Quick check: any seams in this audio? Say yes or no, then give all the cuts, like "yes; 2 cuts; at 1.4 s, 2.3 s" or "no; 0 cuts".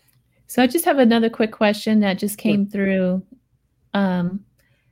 no; 0 cuts